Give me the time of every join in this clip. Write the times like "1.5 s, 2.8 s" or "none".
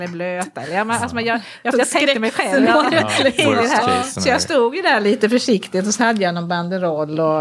1.7 s